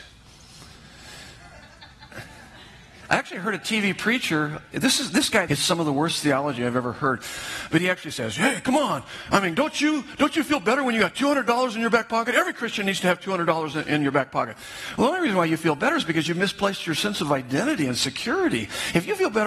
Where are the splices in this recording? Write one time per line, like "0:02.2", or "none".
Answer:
0:05.5